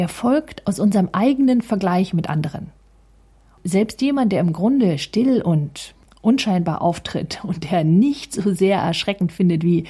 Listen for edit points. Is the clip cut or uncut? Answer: uncut